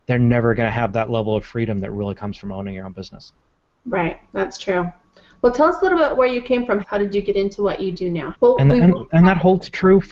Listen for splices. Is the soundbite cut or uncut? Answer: cut